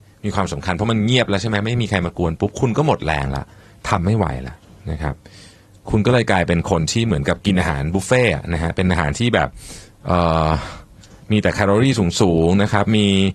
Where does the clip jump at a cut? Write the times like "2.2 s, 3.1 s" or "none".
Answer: none